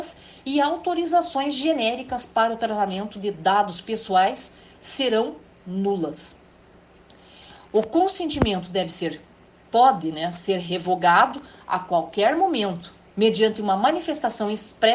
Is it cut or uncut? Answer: uncut